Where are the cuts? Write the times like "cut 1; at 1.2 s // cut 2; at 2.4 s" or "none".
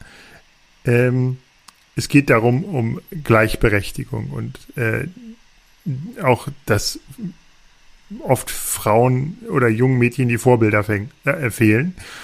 cut 1; at 2.7 s